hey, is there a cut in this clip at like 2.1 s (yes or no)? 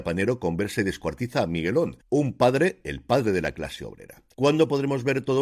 no